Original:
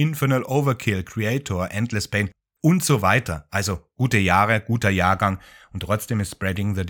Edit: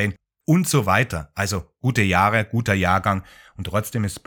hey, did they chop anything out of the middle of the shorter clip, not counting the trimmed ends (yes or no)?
no